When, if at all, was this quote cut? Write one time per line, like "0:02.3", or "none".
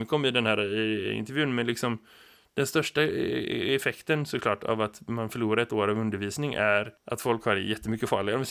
0:07.0